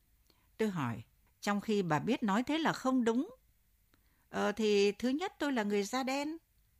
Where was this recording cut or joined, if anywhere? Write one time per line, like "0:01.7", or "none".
0:01.3